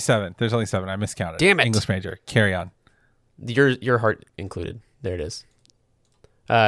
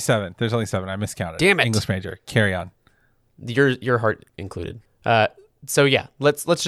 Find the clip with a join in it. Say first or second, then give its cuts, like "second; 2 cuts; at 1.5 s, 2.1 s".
second; 1 cut; at 4.9 s